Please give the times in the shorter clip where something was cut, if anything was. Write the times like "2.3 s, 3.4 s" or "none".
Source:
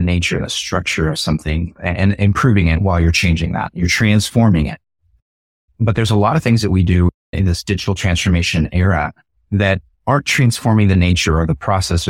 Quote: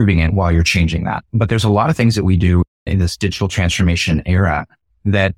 1.2 s